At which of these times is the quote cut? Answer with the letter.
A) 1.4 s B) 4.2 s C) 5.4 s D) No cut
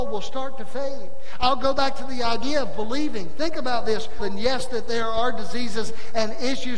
B